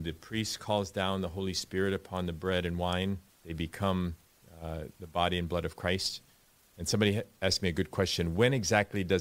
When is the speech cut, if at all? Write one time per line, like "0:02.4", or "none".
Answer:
0:03.3